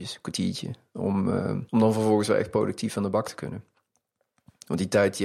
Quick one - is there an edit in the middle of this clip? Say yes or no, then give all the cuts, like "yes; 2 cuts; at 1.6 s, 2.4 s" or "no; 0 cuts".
yes; 1 cut; at 1.7 s